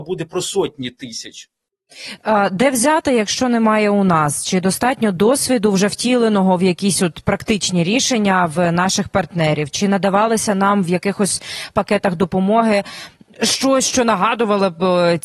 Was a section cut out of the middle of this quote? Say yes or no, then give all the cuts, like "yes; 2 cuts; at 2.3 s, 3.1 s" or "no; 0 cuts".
no; 0 cuts